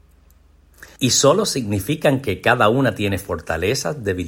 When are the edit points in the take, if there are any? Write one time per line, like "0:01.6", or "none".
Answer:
0:01.0